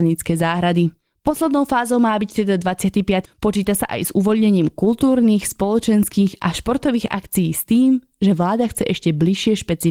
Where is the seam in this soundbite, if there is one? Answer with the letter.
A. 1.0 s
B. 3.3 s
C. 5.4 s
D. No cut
B